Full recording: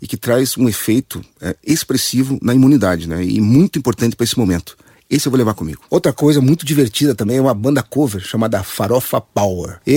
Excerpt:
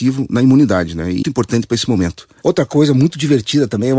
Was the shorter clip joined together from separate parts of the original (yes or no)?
yes